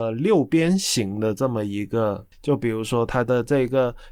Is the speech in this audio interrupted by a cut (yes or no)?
yes